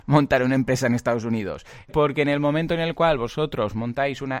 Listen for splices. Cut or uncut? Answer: cut